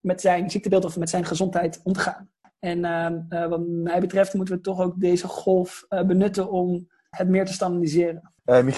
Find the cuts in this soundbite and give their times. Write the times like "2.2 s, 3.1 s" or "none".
2.4 s